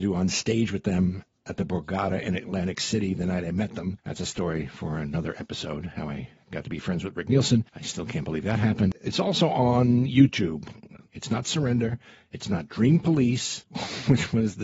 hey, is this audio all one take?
no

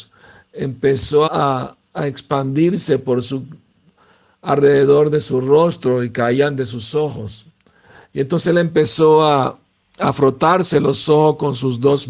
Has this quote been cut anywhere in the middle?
yes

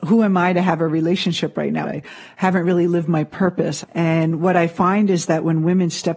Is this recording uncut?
no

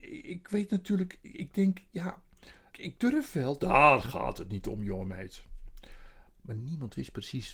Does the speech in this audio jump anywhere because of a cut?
yes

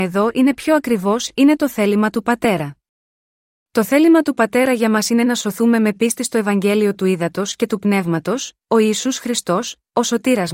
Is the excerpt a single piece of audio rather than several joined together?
yes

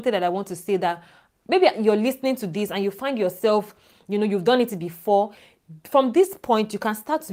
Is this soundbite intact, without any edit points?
yes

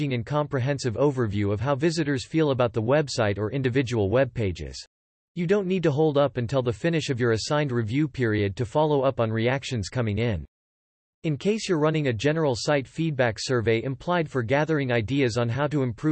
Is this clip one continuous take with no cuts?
no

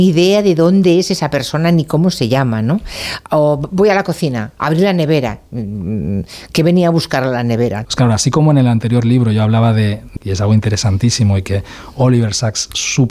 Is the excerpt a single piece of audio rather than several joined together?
no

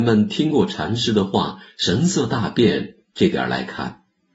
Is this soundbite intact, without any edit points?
yes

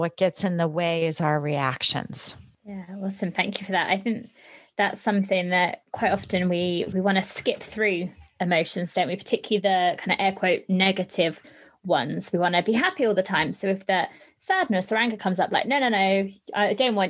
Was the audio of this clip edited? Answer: no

